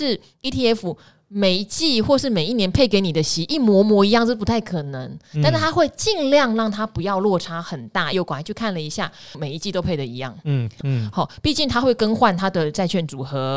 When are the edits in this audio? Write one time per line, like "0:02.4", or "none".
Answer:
0:08.1
0:09.3
0:10.8